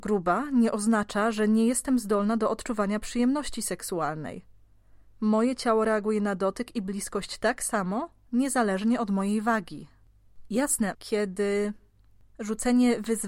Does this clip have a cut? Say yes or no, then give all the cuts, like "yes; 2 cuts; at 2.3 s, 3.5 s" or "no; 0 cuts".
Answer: yes; 1 cut; at 10.9 s